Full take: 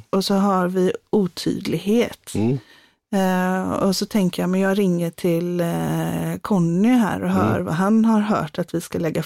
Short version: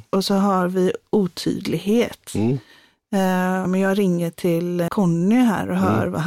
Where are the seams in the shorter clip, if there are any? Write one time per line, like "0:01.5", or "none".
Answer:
0:03.6
0:04.9

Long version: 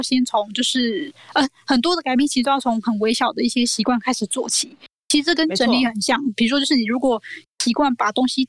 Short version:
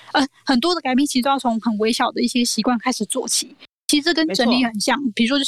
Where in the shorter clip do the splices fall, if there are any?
none

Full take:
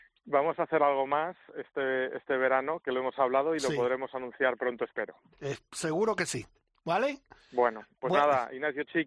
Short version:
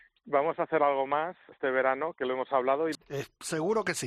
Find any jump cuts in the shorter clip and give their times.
0:01.5
0:02.9

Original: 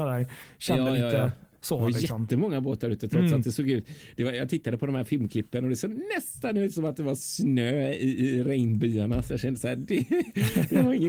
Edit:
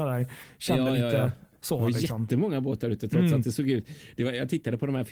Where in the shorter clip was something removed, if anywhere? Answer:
none

